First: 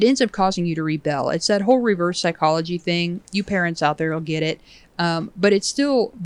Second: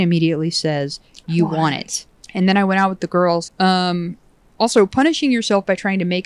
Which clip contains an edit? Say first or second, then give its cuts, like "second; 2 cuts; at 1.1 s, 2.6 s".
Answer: second; 2 cuts; at 2.2 s, 3.4 s